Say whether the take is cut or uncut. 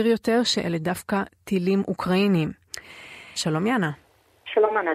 cut